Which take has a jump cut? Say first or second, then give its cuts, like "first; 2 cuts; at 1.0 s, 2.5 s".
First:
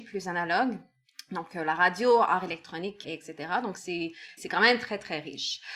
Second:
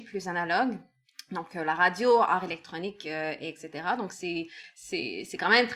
first; 2 cuts; at 3.0 s, 4.4 s